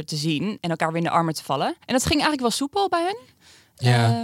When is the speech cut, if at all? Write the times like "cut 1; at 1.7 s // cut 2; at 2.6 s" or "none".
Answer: cut 1; at 1.8 s